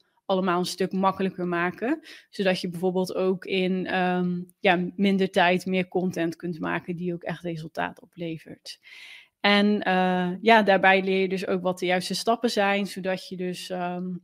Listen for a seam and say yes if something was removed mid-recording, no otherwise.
no